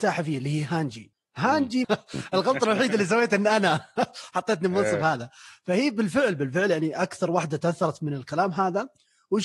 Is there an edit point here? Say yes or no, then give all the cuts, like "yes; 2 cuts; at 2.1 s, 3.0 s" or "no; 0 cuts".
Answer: yes; 1 cut; at 1.8 s